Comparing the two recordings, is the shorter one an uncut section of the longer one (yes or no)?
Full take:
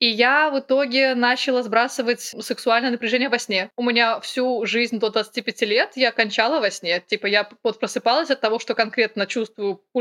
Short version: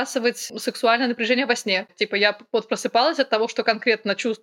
no